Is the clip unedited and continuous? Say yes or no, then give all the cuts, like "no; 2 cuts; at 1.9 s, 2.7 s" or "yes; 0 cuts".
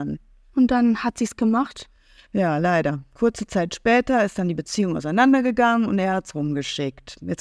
yes; 0 cuts